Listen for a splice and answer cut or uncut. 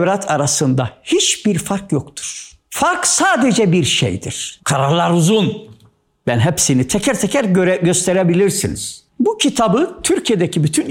cut